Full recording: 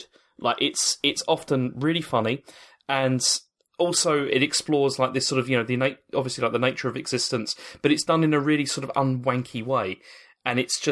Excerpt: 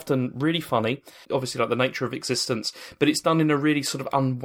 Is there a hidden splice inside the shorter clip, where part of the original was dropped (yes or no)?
yes